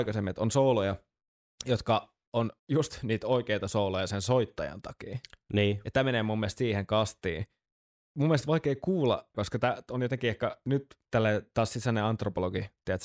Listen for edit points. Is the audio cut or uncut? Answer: cut